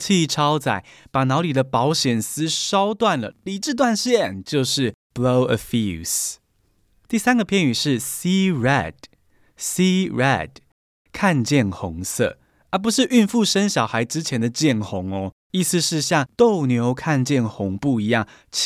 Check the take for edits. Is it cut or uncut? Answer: uncut